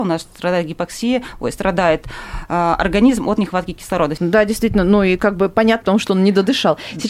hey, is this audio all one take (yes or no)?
no